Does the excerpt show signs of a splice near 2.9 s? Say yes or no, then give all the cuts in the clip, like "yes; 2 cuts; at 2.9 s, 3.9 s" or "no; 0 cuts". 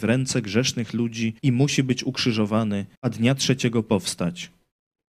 yes; 2 cuts; at 1.4 s, 2.9 s